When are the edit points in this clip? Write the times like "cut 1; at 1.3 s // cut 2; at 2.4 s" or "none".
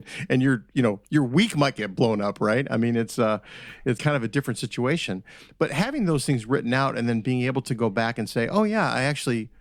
cut 1; at 4.0 s

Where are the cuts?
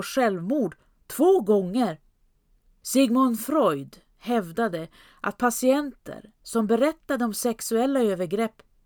cut 1; at 2.8 s

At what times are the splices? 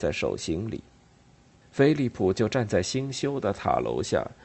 cut 1; at 1.6 s

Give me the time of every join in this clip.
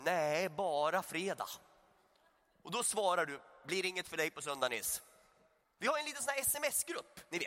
cut 1; at 5.6 s

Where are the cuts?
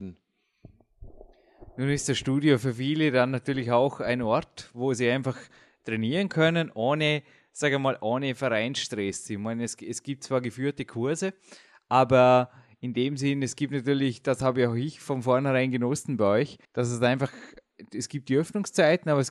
cut 1; at 16.6 s

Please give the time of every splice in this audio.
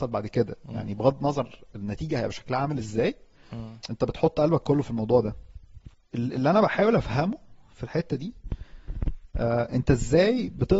none

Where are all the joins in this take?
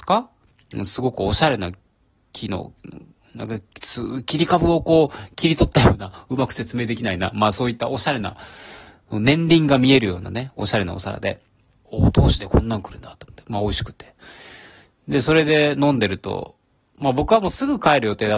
cut 1; at 11.8 s

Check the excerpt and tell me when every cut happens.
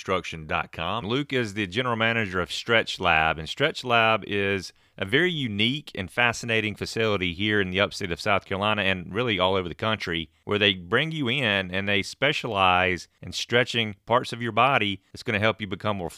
cut 1; at 1.0 s

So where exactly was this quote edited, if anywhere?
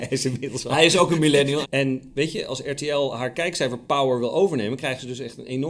cut 1; at 1.6 s

